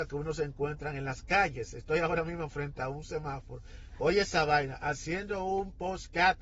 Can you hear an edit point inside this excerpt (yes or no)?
no